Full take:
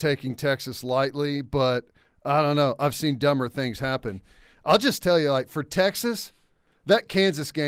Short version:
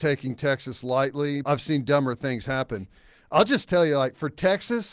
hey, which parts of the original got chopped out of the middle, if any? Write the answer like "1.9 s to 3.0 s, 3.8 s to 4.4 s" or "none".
1.4 s to 2.8 s